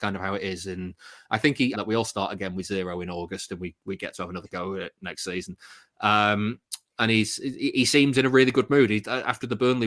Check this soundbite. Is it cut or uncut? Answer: cut